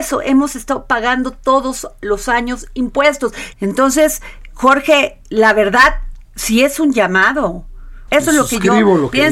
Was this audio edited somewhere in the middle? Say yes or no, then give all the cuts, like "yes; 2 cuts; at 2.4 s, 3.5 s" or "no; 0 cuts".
yes; 2 cuts; at 3.5 s, 8.1 s